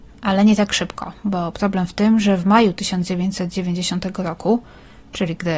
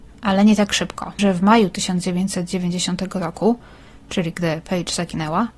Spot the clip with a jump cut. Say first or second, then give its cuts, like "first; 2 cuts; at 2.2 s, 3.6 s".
second; 1 cut; at 1.2 s